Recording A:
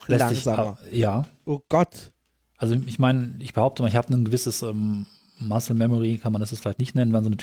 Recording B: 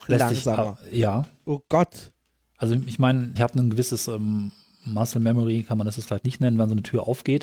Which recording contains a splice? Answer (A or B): B